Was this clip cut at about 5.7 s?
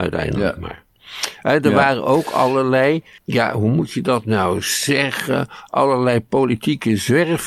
no; 0 cuts

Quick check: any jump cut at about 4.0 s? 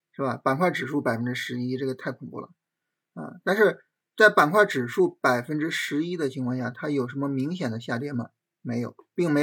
no; 0 cuts

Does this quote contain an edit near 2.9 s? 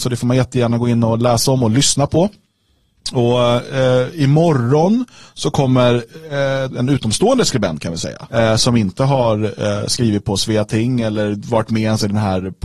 no; 2 cuts; at 6.7 s, 8.3 s

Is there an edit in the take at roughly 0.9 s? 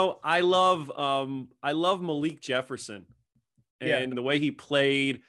no; 1 cut; at 4.1 s

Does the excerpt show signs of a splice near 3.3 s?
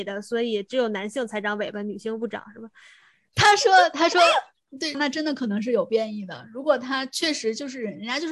yes; 2 cuts; at 3.3 s, 4.9 s

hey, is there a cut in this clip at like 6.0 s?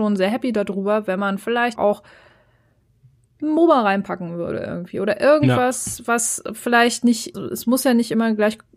no; 2 cuts; at 1.8 s, 7.3 s

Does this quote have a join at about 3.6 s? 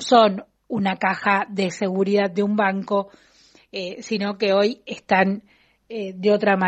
no; 0 cuts

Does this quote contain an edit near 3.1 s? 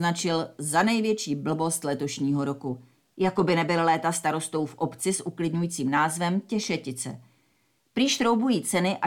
yes; 2 cuts; at 3.1 s, 7.8 s

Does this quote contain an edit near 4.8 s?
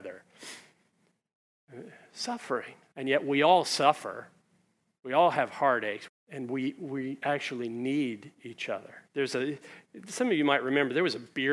no; 3 cuts; at 2.9 s, 6.1 s, 9.1 s

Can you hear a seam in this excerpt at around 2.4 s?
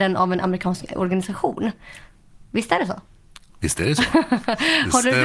yes; 1 cut; at 2.4 s

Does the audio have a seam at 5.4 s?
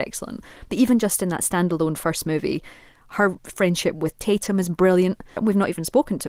yes; 1 cut; at 5.4 s

